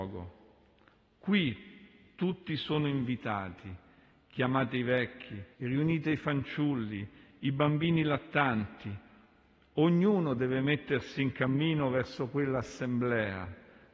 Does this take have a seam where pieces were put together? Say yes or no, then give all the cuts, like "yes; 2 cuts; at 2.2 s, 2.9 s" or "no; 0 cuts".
yes; 1 cut; at 5.5 s